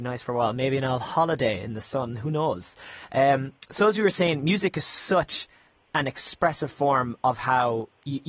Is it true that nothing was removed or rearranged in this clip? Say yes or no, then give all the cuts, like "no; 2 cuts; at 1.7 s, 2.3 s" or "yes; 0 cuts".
yes; 0 cuts